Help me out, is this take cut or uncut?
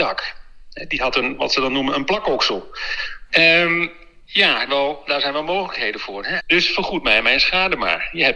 cut